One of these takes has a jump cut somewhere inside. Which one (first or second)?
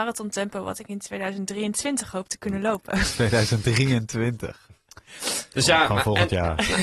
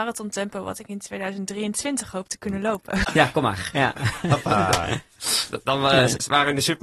second